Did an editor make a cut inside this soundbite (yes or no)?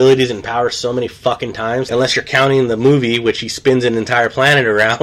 yes